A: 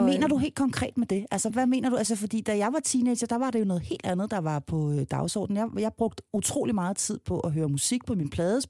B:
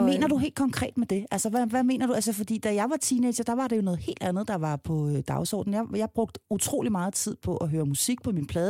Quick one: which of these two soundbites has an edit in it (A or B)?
A